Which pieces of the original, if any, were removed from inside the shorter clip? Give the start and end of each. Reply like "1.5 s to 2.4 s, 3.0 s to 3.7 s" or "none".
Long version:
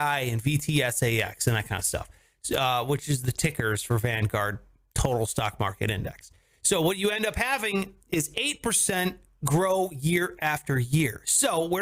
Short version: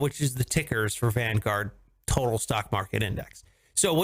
none

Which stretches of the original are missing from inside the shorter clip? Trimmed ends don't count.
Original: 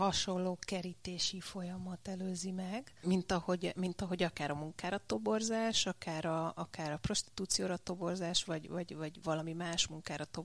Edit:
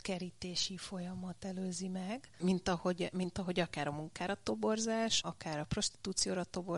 5.8 s to 6.5 s

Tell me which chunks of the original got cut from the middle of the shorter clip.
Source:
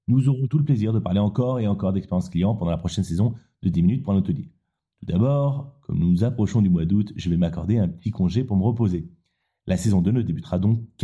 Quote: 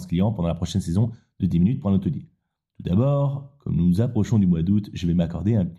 none

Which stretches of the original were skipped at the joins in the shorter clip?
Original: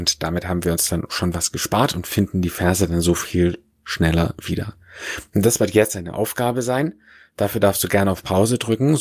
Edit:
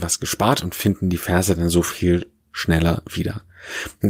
none

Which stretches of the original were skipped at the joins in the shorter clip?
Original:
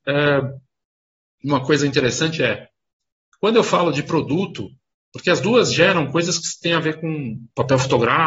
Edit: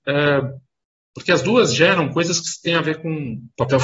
1.0 s to 5.0 s

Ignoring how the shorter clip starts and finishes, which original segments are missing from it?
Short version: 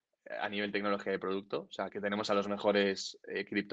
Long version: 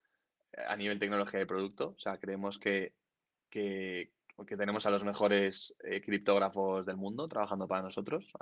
2.2 s to 4.5 s

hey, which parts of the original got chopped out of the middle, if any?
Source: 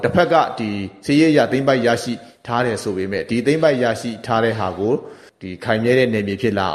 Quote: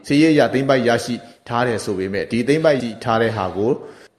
3.8 s to 4.0 s

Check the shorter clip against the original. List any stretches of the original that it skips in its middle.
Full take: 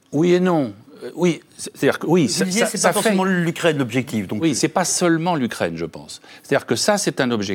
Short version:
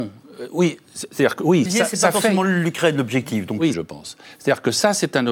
2.3 s to 2.5 s, 4.5 s to 5.8 s

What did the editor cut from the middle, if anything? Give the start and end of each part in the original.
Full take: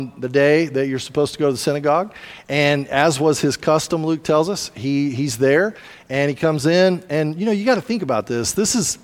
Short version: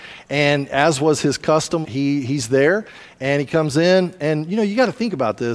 4.0 s to 4.7 s

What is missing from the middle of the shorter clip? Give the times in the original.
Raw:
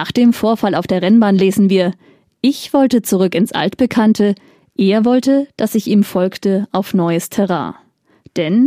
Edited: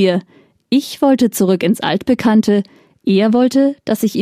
none

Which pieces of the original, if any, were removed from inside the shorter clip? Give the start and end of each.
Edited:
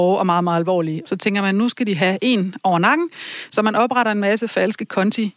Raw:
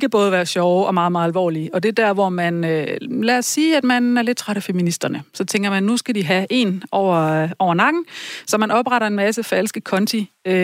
1.7 s to 5.3 s, 6.9 s to 7.6 s

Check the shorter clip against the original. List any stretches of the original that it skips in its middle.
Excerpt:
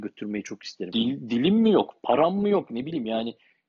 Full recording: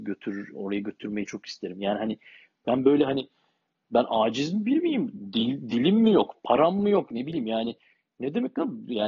1.7 s to 5.3 s

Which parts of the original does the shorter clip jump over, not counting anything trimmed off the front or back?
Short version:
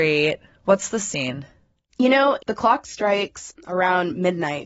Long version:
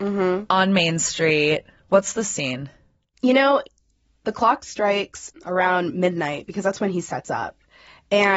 3.7 s to 4.2 s

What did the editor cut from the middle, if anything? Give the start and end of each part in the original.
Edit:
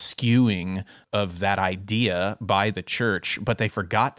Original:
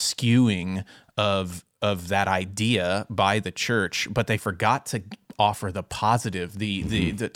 1.0 s to 1.7 s

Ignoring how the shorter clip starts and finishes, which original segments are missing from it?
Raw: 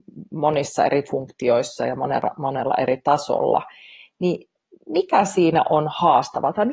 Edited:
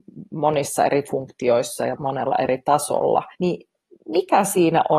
1.9 s to 2.3 s, 3.7 s to 4.1 s

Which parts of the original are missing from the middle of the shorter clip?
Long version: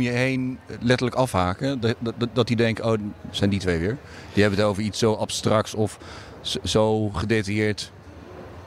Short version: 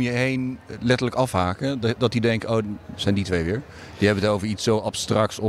2.0 s to 2.3 s

